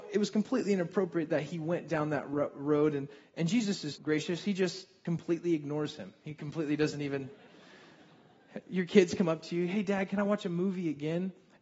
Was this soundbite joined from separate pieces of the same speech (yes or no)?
yes